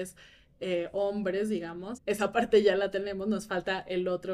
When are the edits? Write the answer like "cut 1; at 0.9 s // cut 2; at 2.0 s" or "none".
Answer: cut 1; at 2.0 s